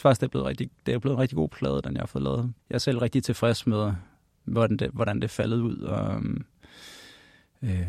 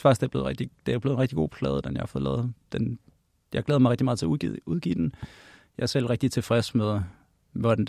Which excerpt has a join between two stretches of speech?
first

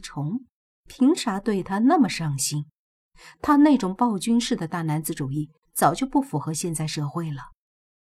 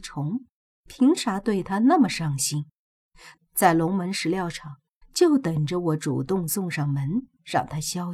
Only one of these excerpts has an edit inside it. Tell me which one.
second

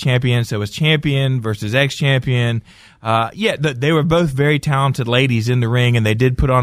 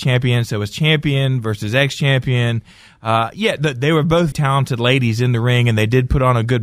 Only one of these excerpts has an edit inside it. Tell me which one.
second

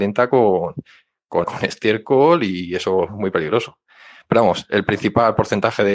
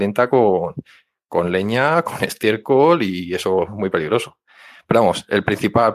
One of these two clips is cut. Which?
first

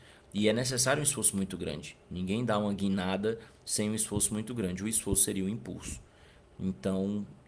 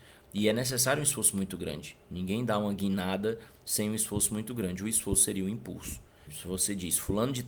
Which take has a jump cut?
second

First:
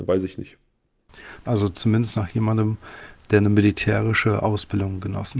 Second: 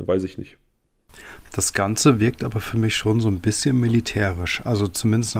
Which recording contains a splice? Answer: first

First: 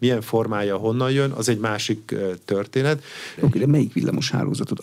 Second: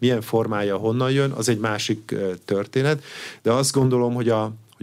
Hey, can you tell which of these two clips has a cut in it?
first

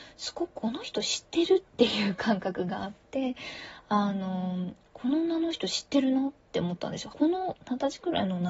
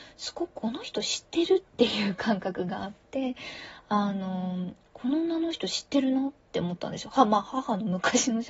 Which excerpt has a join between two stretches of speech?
first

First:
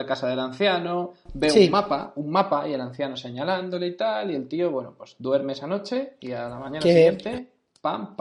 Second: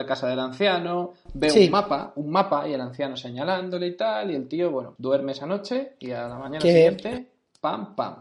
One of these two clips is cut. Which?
second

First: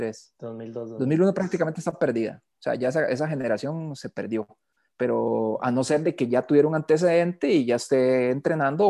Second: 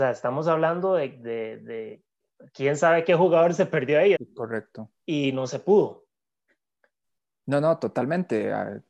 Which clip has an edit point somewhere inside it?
second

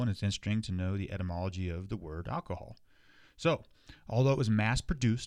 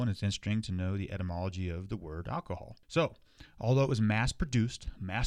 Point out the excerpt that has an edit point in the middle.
second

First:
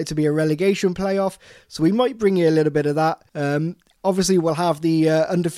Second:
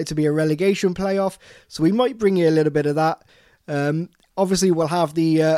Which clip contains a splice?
first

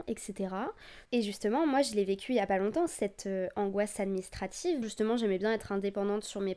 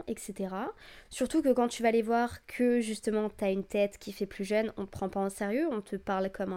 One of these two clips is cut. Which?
first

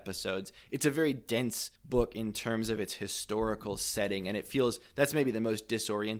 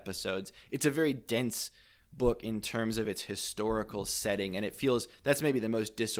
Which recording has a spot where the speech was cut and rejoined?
first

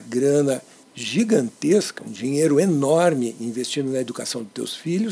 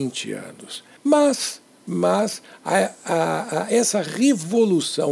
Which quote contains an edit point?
second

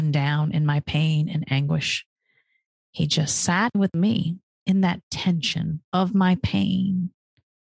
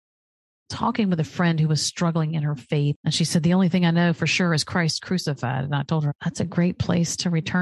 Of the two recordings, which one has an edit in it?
second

